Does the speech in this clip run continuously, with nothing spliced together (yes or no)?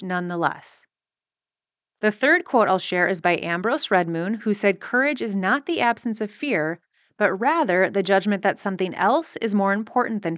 yes